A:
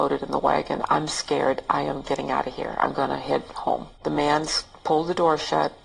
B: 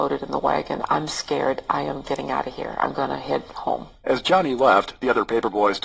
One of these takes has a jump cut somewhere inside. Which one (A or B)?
A